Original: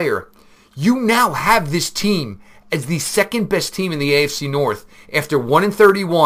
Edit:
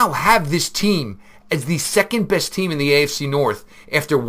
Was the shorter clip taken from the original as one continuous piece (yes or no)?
yes